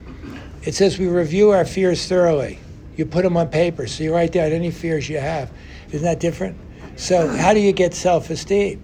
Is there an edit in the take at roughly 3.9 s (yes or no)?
no